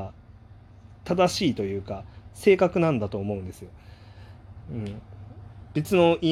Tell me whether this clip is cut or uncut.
cut